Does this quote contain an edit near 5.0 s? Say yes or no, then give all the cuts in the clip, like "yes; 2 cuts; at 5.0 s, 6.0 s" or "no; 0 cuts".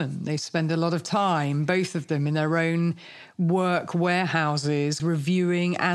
yes; 1 cut; at 5.0 s